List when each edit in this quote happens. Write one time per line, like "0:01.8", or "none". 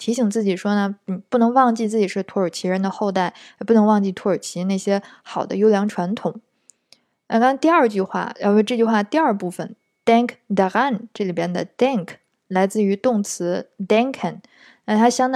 none